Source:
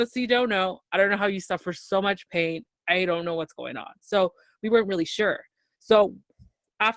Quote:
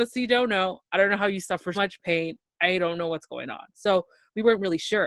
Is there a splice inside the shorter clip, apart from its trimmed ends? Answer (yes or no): yes